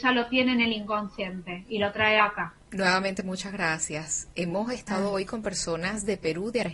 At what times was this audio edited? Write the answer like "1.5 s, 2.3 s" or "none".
2.6 s